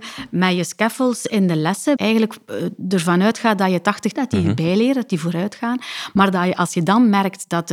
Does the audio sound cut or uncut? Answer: cut